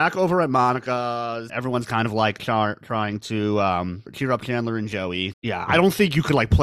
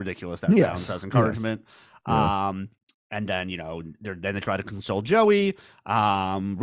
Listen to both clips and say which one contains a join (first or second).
first